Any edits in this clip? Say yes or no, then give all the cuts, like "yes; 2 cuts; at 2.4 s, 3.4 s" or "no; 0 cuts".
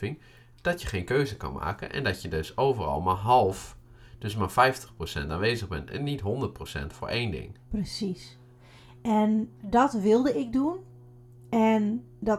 no; 0 cuts